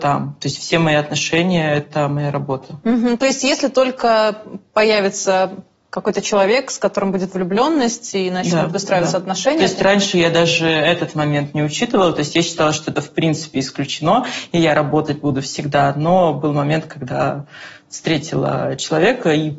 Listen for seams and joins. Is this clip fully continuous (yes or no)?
yes